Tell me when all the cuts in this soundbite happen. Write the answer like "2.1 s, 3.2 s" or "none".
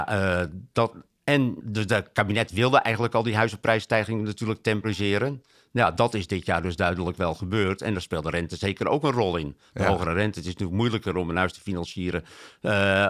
1.6 s